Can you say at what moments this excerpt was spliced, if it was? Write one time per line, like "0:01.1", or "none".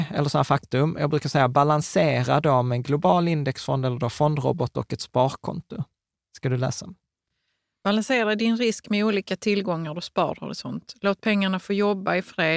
none